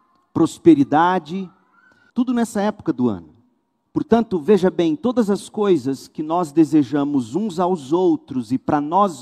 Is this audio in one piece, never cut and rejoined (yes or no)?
no